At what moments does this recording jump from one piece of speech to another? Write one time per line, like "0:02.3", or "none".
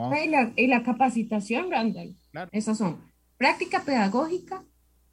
0:02.5